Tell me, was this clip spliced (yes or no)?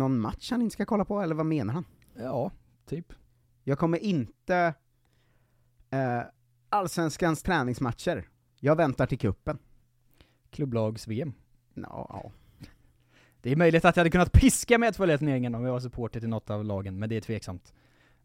no